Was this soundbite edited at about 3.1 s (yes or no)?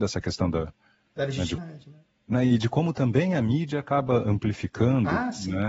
no